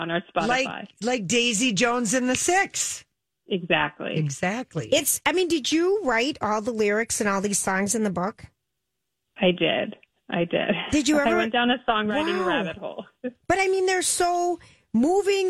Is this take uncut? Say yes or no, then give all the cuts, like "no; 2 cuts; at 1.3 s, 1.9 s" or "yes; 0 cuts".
yes; 0 cuts